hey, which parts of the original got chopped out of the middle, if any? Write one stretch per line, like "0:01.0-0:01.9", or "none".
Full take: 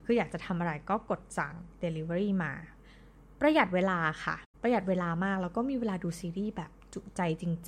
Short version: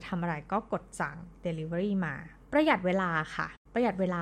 0:02.8-0:03.3